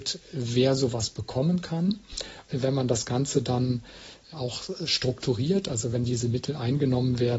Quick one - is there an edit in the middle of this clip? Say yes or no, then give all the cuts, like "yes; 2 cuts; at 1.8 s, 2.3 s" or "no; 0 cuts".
no; 0 cuts